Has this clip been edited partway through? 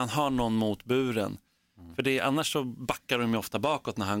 no; 0 cuts

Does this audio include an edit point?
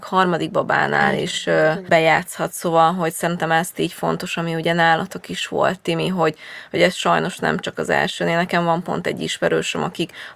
no; 0 cuts

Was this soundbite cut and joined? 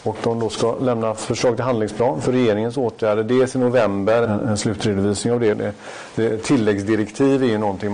yes; 2 cuts; at 4.2 s, 5.5 s

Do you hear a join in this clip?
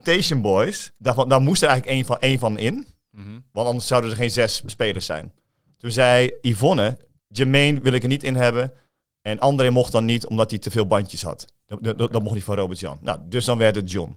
no; 0 cuts

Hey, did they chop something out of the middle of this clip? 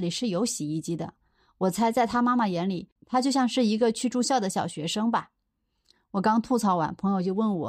no; 0 cuts

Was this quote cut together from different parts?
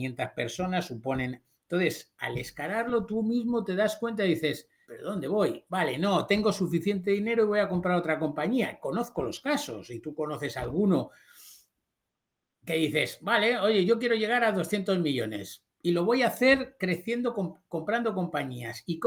yes; 1 cut; at 4.8 s

